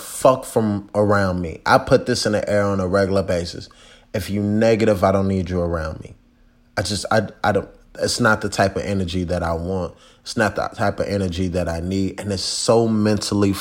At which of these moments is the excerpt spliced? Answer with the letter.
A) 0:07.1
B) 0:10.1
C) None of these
C